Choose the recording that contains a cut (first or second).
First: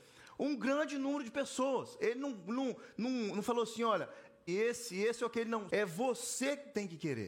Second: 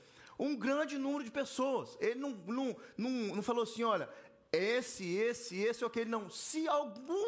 first